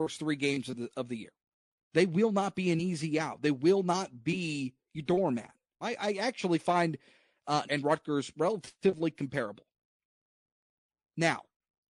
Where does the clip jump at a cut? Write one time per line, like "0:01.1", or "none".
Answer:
0:01.7
0:05.8
0:07.6